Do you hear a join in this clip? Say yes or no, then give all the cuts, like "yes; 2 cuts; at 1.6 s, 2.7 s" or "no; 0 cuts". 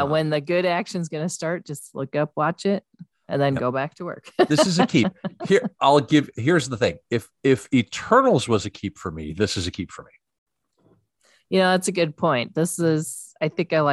no; 0 cuts